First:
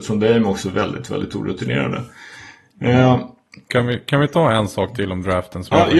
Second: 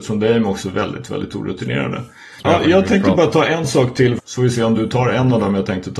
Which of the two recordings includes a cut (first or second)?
second